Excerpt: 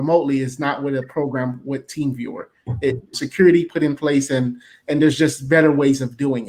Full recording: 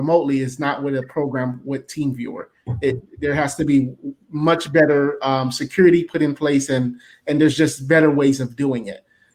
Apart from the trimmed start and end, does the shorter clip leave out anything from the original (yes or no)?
yes